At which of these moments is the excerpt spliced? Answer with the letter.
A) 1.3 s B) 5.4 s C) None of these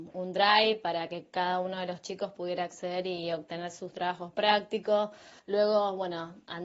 B